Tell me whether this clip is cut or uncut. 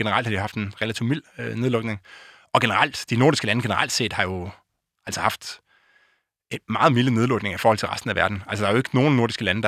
uncut